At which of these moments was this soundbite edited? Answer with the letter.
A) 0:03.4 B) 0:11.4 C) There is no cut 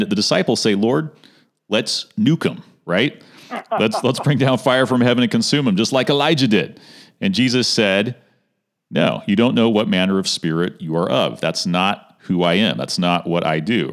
C